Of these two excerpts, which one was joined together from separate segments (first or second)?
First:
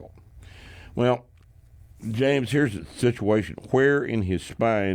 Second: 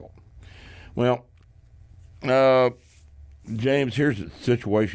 first